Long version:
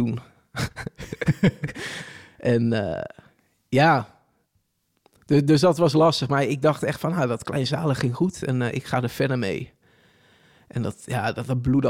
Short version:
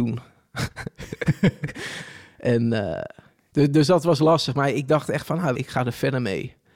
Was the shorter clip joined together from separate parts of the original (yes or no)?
yes